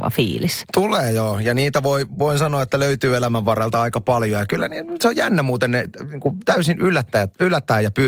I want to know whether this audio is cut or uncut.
uncut